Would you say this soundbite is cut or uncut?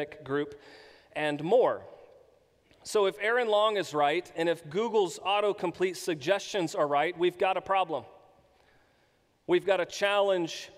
uncut